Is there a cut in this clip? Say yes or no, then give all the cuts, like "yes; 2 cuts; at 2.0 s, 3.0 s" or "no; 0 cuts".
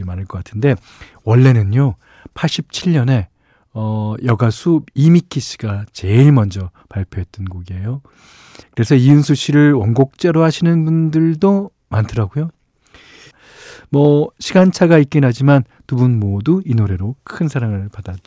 yes; 2 cuts; at 8.6 s, 13.3 s